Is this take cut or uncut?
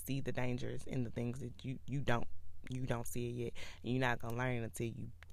uncut